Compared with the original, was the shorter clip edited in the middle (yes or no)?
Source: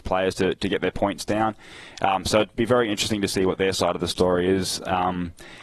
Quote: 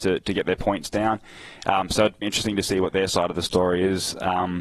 yes